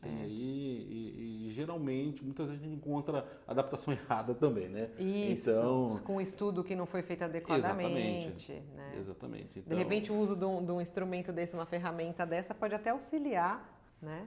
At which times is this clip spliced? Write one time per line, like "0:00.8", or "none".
none